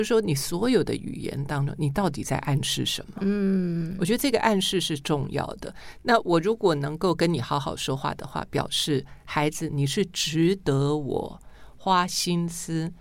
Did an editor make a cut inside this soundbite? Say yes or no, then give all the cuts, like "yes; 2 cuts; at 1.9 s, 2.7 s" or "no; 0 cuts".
no; 0 cuts